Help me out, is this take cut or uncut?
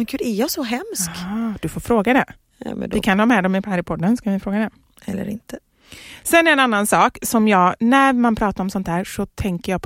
uncut